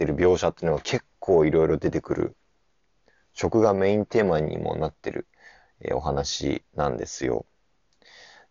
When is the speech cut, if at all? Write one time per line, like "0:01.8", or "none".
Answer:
none